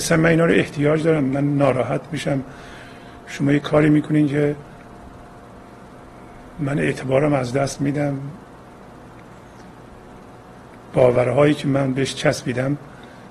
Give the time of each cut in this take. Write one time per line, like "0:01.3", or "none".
none